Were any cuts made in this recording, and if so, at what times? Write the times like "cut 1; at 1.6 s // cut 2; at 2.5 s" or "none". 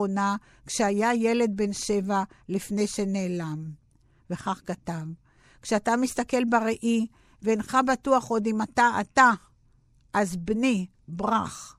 none